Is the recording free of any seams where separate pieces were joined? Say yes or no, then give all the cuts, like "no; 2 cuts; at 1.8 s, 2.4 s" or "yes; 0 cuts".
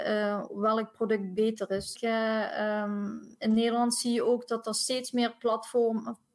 no; 1 cut; at 1.9 s